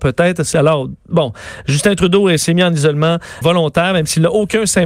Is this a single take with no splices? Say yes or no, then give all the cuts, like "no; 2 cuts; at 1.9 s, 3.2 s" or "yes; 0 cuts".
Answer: no; 1 cut; at 3.4 s